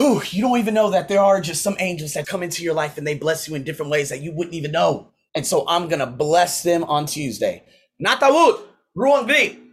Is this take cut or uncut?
cut